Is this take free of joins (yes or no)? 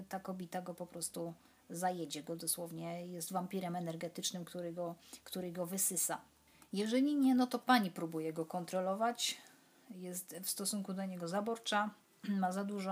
yes